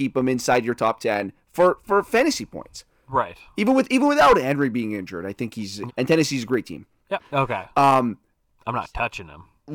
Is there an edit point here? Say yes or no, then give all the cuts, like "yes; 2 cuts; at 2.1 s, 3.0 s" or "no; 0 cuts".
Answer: yes; 2 cuts; at 5.9 s, 7.3 s